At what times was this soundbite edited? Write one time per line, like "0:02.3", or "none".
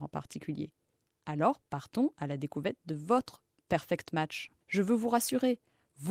0:01.0
0:04.6

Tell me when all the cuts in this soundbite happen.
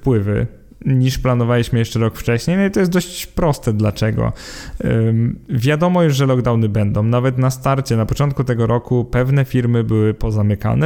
none

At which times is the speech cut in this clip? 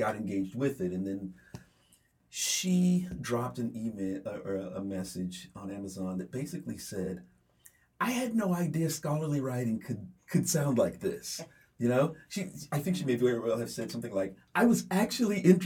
0:10.2

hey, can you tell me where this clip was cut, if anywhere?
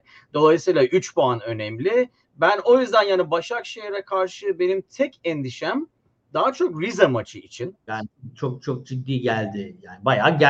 0:07.9

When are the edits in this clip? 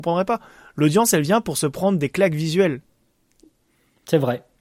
none

